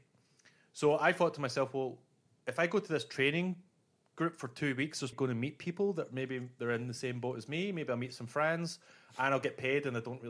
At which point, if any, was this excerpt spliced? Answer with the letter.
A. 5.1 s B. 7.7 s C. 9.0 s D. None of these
A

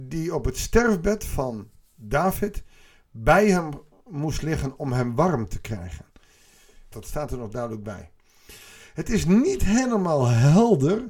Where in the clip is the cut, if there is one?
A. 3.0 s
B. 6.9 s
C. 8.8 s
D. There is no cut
B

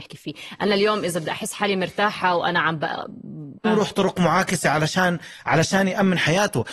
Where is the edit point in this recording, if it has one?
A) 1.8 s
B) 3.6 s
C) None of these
B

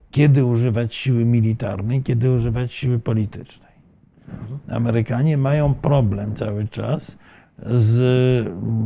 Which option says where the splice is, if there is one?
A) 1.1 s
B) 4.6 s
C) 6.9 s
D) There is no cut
D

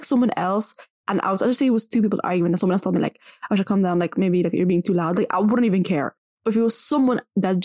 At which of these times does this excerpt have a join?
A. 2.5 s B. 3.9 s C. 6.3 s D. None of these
D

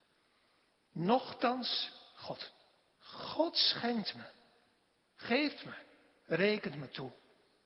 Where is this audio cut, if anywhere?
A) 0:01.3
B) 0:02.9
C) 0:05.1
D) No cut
B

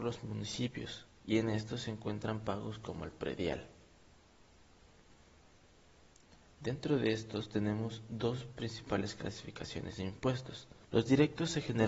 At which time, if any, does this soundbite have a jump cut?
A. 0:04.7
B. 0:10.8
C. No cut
B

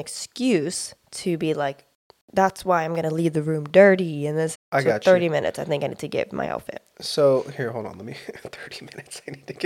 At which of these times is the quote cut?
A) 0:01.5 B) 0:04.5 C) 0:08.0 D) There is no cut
B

